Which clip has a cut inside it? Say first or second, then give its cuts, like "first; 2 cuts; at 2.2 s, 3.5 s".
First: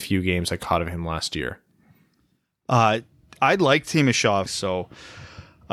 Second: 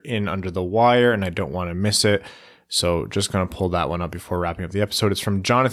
first; 1 cut; at 4.5 s